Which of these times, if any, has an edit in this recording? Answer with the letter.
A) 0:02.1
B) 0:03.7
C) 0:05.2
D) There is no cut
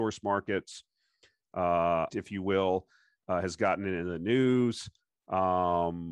A